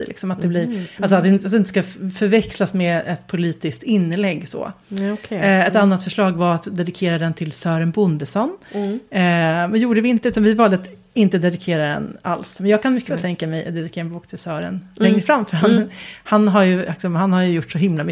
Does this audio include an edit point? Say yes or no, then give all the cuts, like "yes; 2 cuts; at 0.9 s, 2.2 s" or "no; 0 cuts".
no; 0 cuts